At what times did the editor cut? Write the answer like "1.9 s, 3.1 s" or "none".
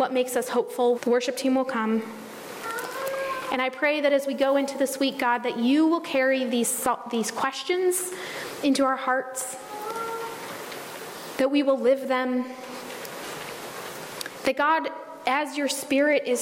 0.9 s